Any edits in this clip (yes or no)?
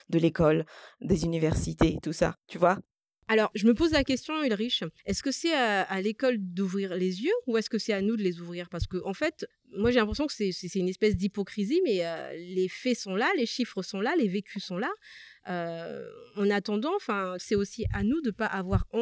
yes